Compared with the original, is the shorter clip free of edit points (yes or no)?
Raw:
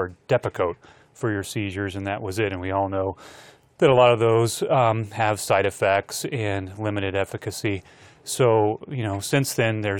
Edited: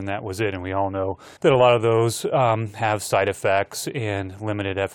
no